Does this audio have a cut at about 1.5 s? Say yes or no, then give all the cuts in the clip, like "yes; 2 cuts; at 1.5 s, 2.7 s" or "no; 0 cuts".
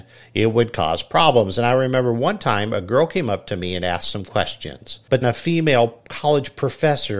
no; 1 cut; at 5.2 s